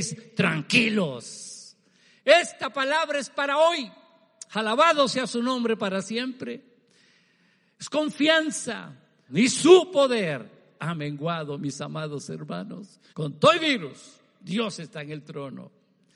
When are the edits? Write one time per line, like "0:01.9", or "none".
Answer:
0:09.3
0:13.1